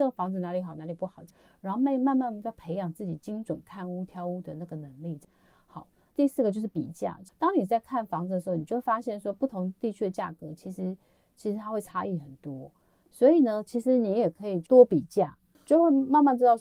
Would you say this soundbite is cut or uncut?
uncut